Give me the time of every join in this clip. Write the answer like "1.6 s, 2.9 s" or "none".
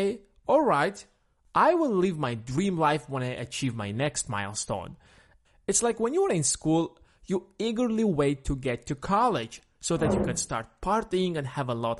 none

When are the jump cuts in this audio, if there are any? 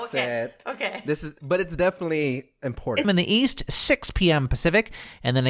3.0 s

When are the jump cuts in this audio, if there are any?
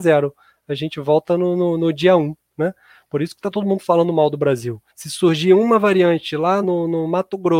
4.9 s, 6.6 s

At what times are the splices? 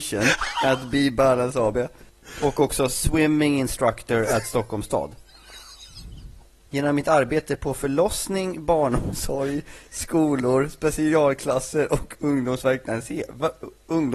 6.7 s

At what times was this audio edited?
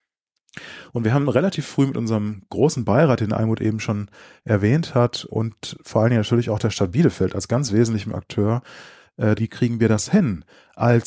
9.4 s

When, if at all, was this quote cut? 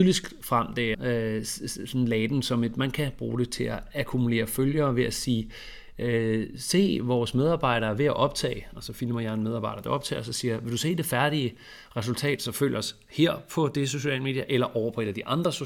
0.9 s

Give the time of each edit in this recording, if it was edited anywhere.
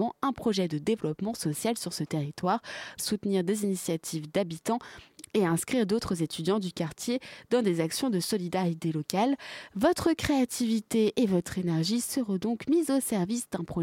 3.0 s

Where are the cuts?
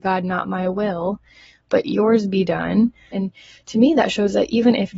3.1 s

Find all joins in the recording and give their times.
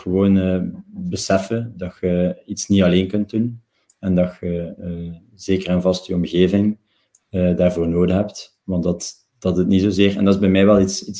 none

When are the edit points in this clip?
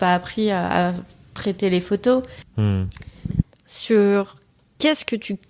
2.4 s, 3.4 s

